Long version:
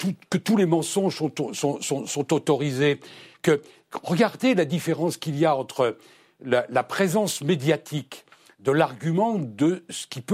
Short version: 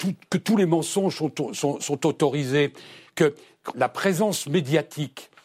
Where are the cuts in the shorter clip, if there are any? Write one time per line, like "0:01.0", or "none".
0:01.8
0:03.7